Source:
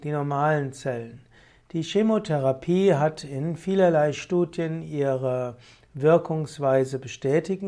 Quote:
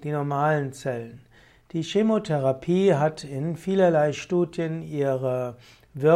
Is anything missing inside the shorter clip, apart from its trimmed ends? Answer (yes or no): no